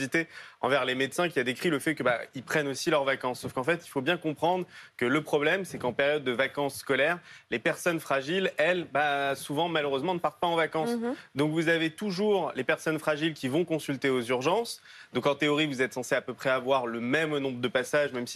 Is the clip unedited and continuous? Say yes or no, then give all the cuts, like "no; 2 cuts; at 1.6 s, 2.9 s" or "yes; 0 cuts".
yes; 0 cuts